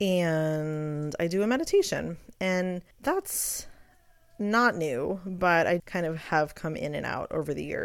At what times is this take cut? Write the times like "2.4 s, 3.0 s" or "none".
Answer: 2.9 s, 5.8 s